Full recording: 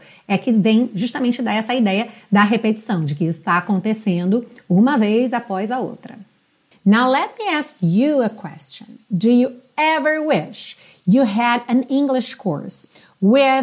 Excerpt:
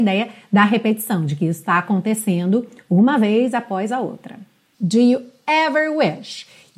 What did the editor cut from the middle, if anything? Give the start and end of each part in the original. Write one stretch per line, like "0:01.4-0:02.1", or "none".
0:06.5-0:09.0